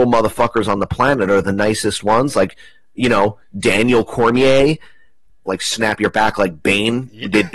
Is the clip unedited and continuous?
no; 1 cut; at 5.5 s

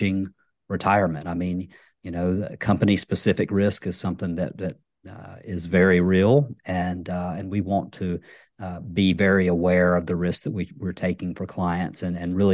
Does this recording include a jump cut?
no; 0 cuts

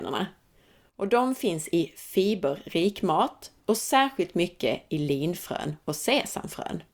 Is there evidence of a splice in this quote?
yes; 1 cut; at 3.6 s

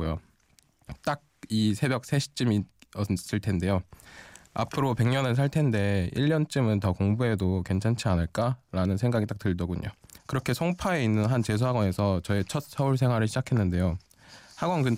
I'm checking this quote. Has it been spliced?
yes; 1 cut; at 10.2 s

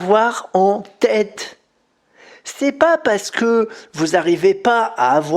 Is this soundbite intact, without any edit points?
yes; 0 cuts

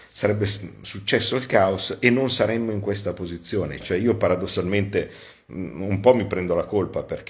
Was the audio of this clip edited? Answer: yes; 1 cut; at 3.8 s

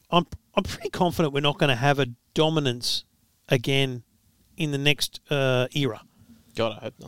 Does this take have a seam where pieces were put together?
no; 0 cuts

